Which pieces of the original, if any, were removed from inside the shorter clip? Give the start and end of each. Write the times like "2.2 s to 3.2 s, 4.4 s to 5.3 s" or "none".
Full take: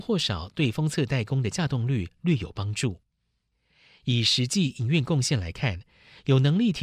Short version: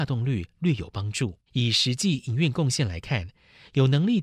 3.1 s to 4.0 s